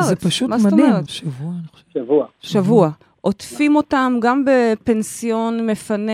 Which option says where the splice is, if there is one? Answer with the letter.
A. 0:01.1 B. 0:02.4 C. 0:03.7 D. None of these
A